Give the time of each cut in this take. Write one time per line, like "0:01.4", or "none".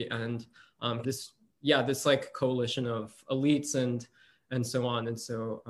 0:01.0